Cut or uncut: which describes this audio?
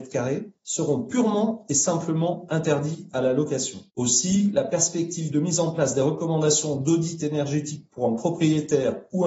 cut